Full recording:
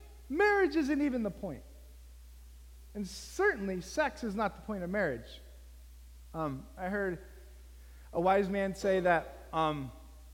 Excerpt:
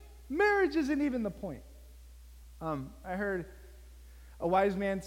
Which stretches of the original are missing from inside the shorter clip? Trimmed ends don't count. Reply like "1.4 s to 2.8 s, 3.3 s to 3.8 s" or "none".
2.4 s to 6.2 s